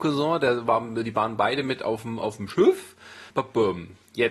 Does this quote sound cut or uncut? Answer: cut